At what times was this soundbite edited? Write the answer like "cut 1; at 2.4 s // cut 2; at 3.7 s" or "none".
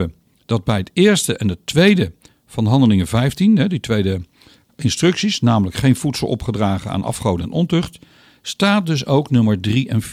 none